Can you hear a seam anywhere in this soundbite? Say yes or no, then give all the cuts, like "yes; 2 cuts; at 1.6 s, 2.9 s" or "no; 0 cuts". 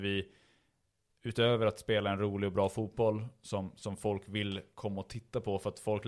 no; 0 cuts